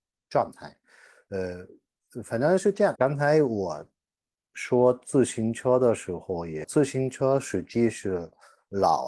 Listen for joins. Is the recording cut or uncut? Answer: cut